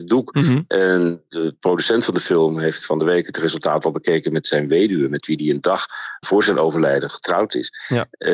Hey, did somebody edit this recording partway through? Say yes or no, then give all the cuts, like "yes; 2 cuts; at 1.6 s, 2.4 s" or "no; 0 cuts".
no; 0 cuts